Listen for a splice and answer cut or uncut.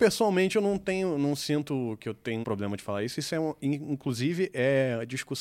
cut